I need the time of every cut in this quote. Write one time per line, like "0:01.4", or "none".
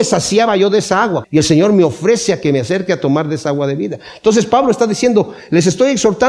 0:01.2